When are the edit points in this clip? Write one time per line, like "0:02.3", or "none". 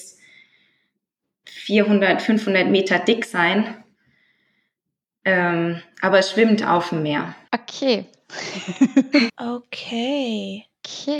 0:07.5
0:09.3